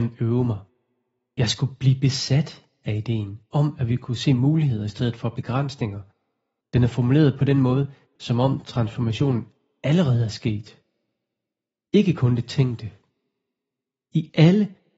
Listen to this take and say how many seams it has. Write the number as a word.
three